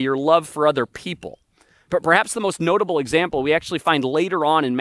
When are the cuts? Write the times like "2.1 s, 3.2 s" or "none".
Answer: none